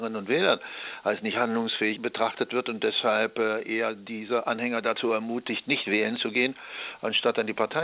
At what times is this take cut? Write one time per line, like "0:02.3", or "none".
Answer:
none